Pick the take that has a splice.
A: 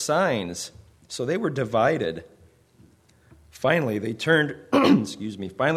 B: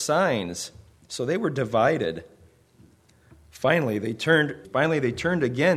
B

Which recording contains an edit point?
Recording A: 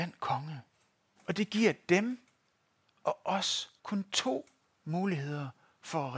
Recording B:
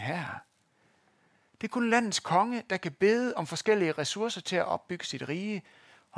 A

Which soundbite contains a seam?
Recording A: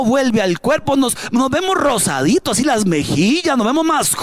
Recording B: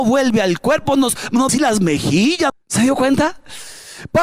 B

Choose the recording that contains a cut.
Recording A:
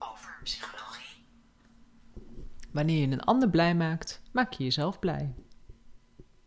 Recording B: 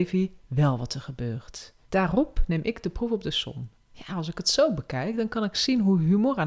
B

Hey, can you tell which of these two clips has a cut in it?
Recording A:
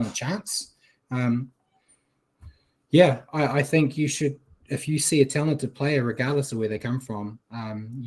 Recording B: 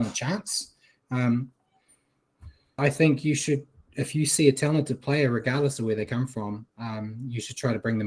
B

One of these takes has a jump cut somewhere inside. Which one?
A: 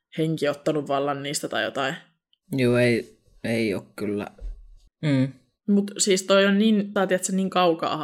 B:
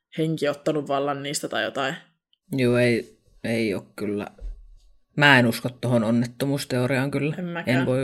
A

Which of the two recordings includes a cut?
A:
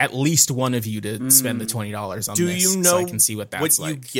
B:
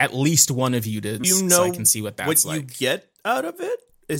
B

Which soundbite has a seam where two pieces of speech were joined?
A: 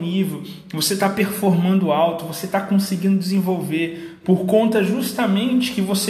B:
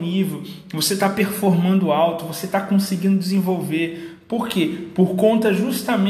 A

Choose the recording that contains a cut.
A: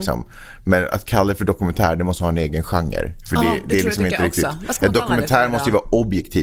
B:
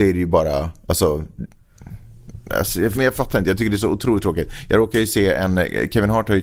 B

